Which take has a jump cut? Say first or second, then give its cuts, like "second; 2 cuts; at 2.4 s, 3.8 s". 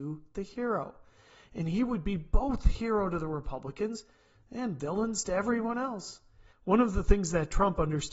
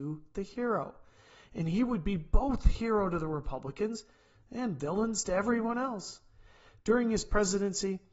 first; 1 cut; at 6.5 s